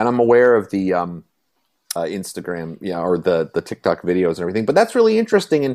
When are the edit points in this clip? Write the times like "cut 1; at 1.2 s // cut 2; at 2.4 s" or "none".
cut 1; at 2.0 s

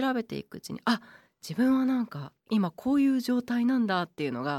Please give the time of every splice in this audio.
cut 1; at 2.4 s

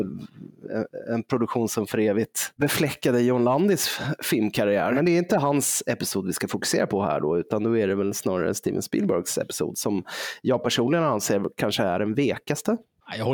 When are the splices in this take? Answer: none

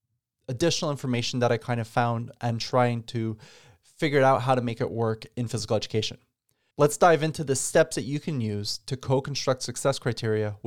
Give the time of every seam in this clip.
cut 1; at 6.7 s

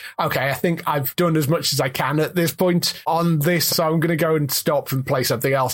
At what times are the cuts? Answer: cut 1; at 3.7 s

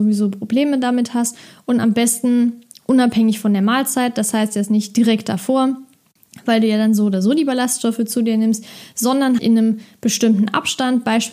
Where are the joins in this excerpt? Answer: cut 1; at 9.4 s

